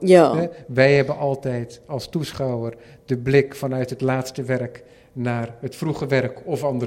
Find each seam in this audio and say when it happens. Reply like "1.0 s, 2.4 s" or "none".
none